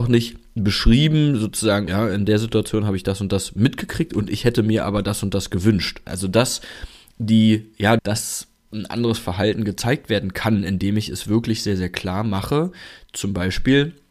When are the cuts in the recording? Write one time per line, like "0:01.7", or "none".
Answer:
0:01.9
0:06.1
0:08.0